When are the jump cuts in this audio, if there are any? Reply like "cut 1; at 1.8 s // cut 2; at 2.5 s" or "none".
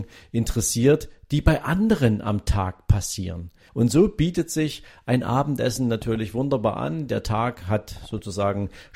cut 1; at 3.7 s